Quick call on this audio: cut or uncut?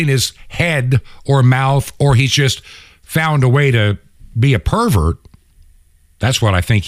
uncut